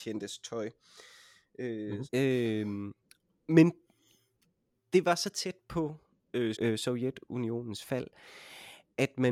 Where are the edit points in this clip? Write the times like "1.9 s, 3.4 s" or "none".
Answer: 2.1 s, 6.5 s